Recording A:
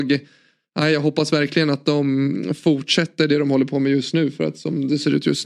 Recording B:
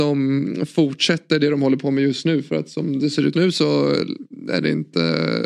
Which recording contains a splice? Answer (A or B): B